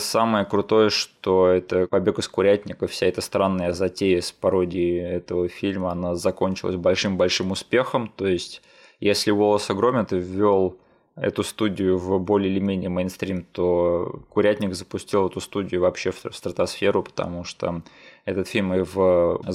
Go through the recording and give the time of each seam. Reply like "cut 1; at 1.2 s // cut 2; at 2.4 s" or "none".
none